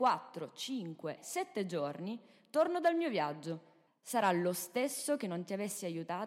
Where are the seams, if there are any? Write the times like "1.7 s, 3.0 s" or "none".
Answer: 1.2 s, 3.9 s